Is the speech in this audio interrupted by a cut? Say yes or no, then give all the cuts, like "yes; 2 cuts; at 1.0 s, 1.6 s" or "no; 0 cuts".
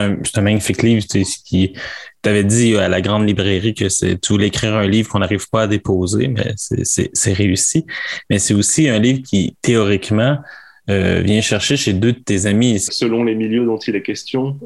yes; 1 cut; at 12.9 s